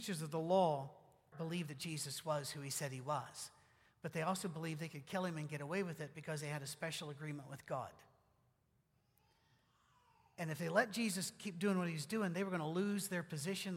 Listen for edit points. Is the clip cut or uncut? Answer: cut